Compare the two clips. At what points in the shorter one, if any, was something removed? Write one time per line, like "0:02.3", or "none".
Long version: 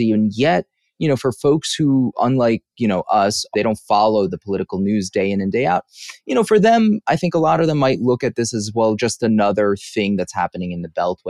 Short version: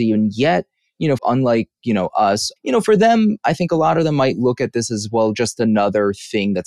0:01.2
0:02.6